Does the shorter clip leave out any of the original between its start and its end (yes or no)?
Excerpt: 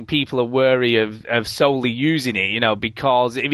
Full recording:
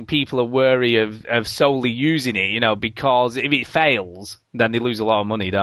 no